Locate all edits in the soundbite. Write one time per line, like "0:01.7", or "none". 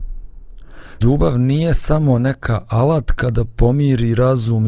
0:01.0